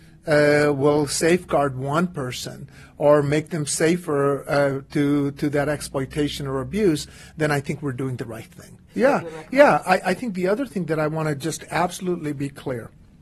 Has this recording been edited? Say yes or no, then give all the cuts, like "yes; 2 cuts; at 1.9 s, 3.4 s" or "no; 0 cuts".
yes; 1 cut; at 8.9 s